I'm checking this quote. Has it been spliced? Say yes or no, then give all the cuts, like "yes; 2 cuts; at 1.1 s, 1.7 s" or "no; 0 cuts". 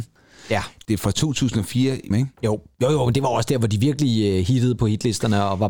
yes; 1 cut; at 2.1 s